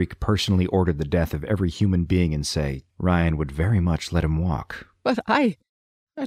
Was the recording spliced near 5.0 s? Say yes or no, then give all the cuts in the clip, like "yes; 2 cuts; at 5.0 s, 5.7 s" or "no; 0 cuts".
no; 1 cut; at 2.9 s